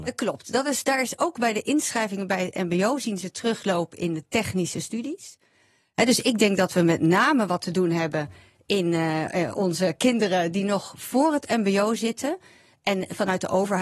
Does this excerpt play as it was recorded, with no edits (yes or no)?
yes